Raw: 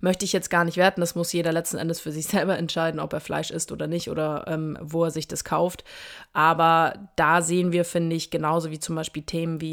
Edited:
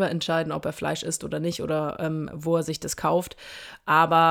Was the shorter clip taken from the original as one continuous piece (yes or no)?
yes